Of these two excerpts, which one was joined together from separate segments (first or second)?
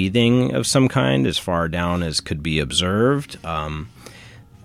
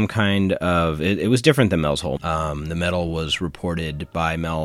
second